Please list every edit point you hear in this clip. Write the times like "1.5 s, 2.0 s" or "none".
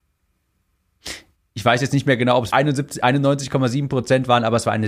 2.5 s